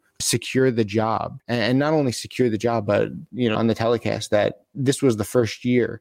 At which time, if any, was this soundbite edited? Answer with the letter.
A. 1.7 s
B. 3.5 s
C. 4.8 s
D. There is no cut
B